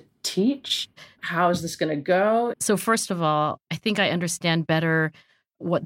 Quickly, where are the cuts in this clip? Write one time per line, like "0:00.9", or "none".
0:01.2
0:02.5